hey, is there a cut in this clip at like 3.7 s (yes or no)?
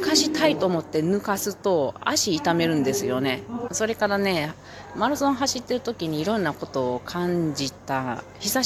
yes